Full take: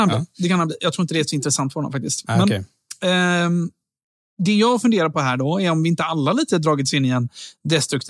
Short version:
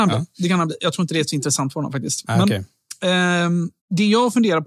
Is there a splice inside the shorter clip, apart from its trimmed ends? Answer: yes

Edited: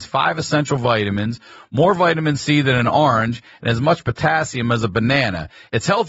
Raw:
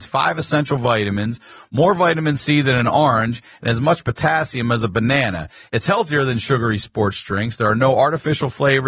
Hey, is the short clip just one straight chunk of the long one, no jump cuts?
yes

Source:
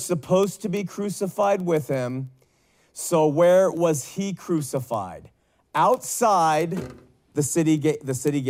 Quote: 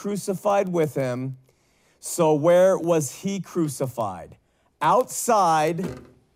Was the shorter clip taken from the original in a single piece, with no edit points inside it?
yes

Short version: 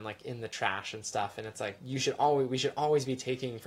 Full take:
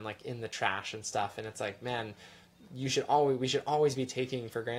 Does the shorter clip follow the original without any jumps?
no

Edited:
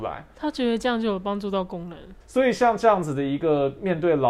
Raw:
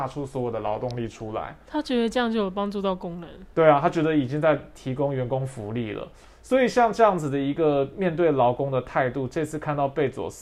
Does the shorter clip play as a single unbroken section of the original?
no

